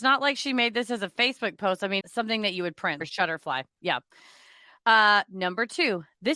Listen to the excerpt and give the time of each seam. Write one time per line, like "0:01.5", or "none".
0:02.0
0:03.0

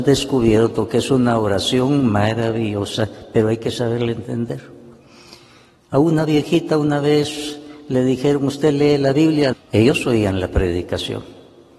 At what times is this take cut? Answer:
0:09.5

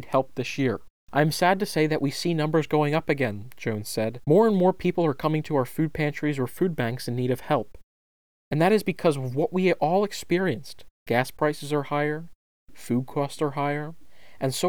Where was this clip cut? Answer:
none

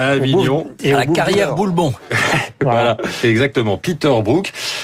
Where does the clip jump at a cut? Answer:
0:03.2

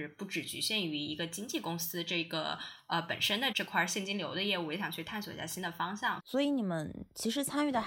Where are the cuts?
0:03.5
0:06.2

